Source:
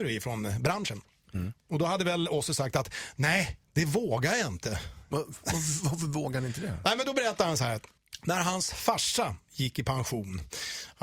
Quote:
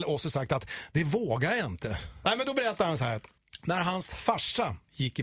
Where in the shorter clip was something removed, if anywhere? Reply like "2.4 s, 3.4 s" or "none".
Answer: 0.9 s, 2.2 s